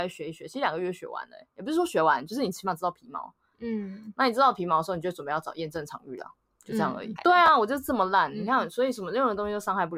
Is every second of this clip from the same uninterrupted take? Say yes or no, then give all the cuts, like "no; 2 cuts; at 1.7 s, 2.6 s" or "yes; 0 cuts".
no; 1 cut; at 7.2 s